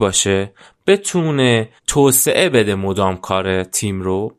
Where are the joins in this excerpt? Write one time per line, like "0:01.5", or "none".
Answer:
0:01.8